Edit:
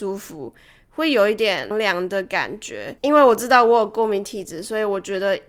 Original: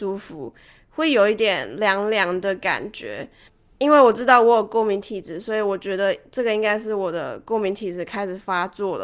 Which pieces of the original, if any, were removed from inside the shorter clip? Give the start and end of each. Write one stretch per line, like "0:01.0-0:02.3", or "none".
0:01.7-0:02.0
0:03.3-0:03.8